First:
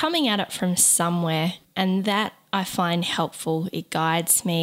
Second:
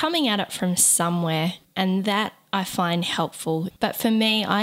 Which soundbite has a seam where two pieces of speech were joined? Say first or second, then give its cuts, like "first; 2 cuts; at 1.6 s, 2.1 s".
second; 1 cut; at 3.7 s